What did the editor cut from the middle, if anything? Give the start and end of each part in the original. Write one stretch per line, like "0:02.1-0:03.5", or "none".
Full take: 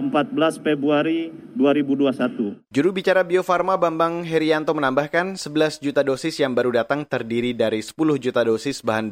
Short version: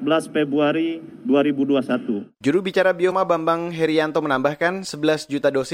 0:03.4-0:03.6